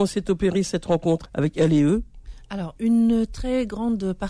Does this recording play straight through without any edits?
no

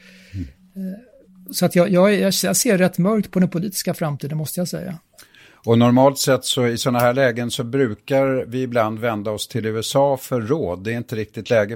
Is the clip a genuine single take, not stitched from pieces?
yes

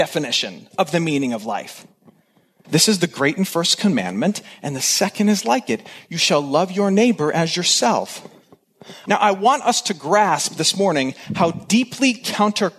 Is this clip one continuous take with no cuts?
no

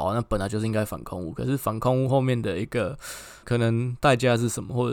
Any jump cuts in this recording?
yes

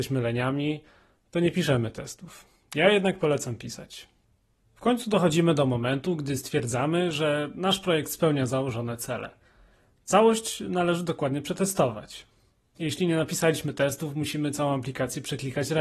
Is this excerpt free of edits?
no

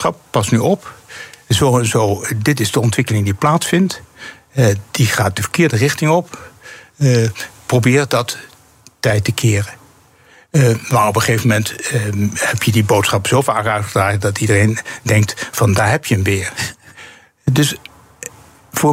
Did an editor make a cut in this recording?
no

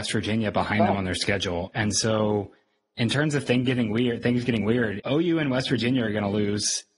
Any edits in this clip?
yes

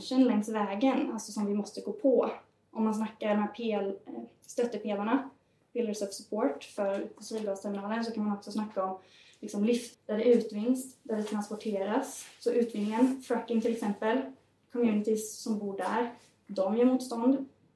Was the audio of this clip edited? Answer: yes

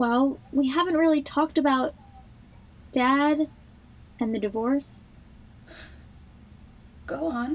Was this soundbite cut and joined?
no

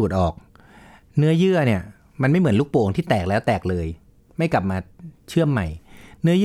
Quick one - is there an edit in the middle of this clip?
no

